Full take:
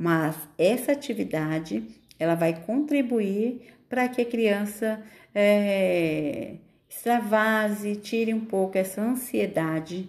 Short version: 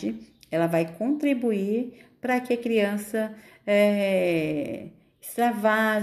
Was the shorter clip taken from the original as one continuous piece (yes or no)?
yes